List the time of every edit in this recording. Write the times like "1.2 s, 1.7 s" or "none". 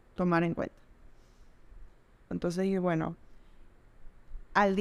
2.3 s